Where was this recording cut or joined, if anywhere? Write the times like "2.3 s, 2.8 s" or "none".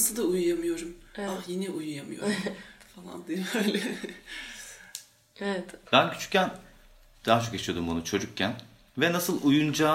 5.9 s